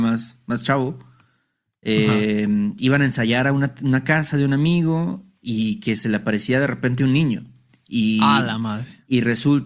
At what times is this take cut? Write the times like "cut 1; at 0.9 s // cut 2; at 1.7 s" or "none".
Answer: none